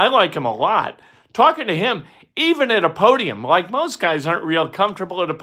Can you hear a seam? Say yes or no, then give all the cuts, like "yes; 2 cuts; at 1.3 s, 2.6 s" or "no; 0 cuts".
no; 0 cuts